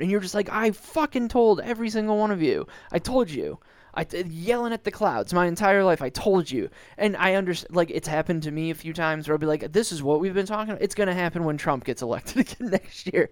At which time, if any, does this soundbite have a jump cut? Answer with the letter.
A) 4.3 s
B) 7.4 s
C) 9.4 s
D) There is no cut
D